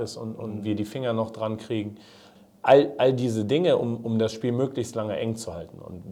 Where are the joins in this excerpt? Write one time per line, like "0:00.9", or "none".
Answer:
none